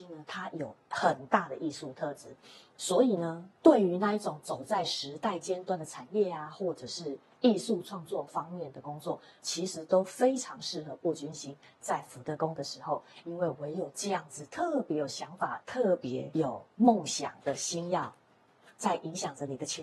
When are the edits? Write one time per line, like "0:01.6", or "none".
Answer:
none